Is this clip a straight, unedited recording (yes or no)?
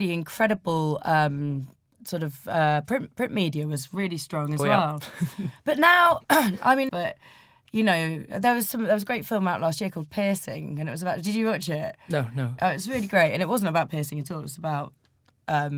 no